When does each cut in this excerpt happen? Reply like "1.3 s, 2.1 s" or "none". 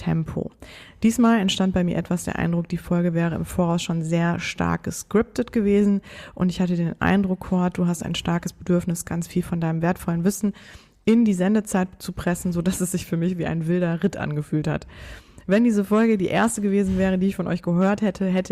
9.0 s

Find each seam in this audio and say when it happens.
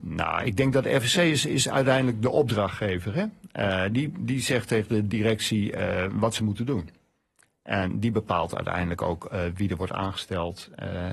none

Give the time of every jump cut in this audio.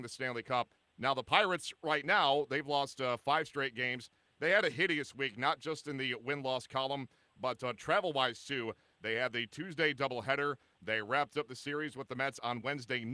none

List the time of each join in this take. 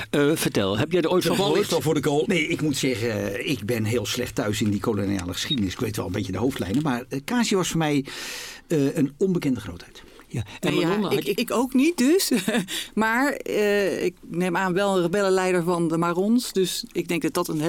2.2 s, 11.3 s

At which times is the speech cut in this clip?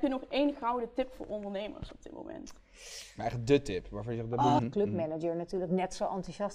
4.6 s

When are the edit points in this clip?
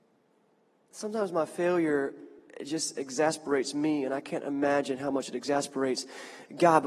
none

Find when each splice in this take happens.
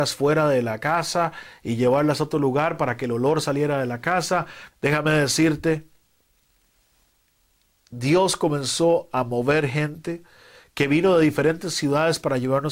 4.7 s

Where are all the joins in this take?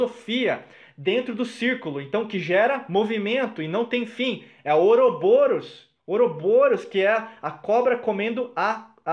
none

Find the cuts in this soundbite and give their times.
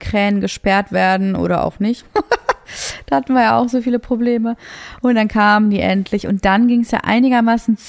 none

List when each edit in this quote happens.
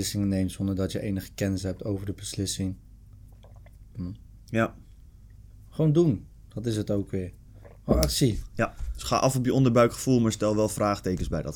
3.9 s

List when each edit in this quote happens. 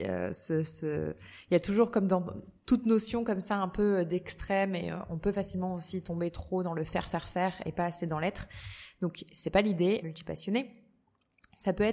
10.0 s

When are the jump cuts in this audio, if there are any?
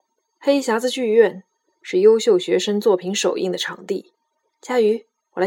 4.5 s

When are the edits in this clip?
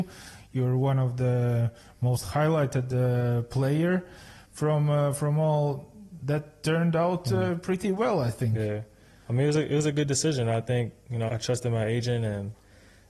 11.3 s

